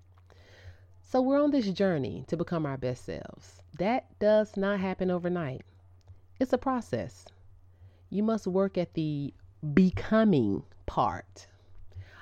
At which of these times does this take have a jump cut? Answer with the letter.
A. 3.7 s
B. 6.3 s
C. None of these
A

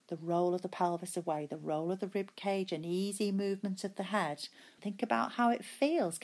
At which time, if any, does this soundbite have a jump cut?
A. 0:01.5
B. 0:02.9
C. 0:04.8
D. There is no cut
C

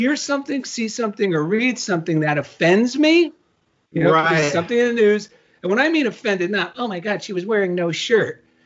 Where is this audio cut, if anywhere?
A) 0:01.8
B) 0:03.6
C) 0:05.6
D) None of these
D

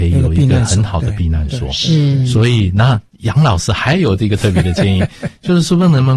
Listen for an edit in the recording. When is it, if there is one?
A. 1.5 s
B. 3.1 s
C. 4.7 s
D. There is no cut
B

